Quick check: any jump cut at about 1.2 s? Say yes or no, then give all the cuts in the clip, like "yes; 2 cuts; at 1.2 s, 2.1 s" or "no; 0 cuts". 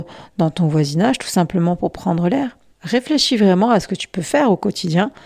no; 1 cut; at 2.7 s